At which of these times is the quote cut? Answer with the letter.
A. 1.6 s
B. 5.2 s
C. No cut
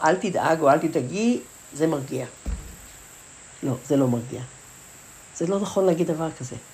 A